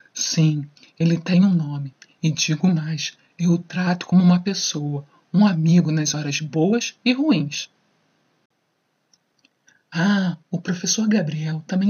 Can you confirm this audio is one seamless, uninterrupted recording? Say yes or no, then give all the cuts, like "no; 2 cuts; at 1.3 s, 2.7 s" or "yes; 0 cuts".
yes; 0 cuts